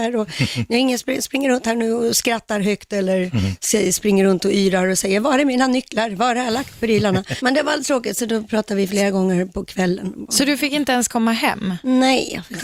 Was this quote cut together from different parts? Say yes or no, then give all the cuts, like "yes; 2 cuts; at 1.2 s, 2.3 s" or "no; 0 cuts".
yes; 1 cut; at 7.4 s